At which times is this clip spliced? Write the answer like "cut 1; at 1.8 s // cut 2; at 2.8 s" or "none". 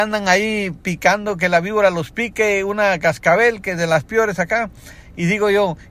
none